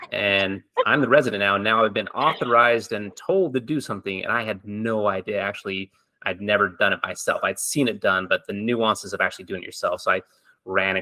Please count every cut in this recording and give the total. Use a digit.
0